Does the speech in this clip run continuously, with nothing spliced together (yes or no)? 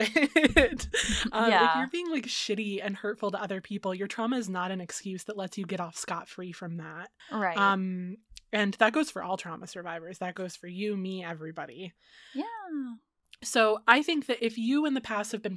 no